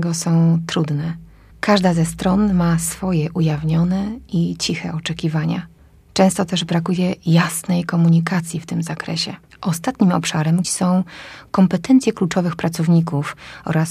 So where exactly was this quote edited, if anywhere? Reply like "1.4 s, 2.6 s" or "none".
9.5 s, 10.6 s